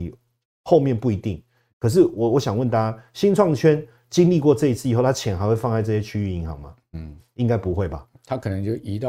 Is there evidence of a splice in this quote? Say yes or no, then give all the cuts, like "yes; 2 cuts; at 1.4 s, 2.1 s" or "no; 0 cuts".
no; 0 cuts